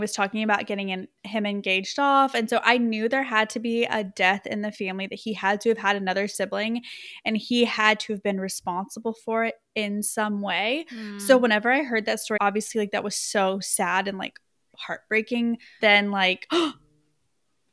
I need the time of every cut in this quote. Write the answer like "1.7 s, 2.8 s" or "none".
12.4 s, 15.8 s